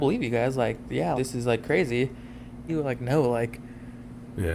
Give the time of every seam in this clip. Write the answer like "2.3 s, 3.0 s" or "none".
1.1 s, 2.7 s

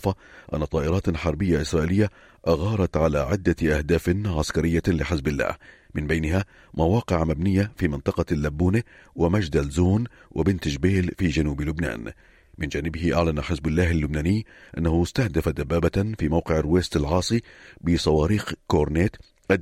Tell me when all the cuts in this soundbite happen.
none

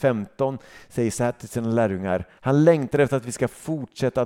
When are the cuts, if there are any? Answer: 2.4 s

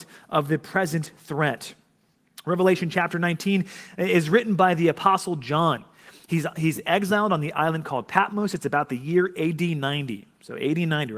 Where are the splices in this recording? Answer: none

